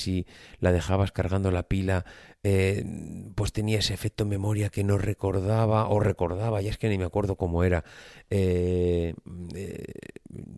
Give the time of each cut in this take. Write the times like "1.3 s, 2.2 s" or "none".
none